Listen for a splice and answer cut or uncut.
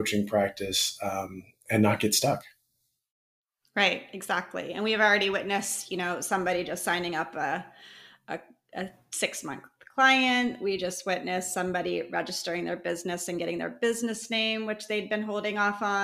uncut